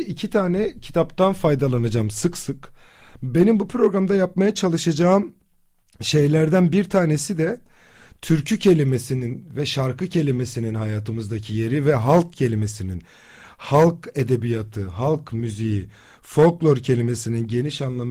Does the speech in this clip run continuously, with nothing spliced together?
no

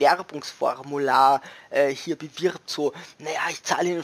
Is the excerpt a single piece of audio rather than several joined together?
yes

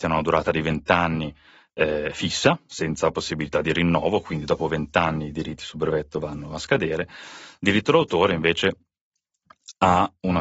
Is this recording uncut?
yes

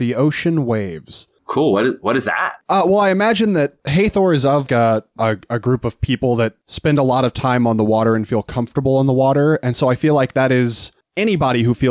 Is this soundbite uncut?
no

